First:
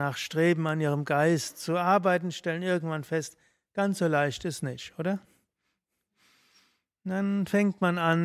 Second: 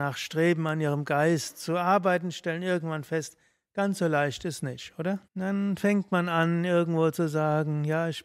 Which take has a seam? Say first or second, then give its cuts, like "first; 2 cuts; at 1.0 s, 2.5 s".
second; 1 cut; at 5.2 s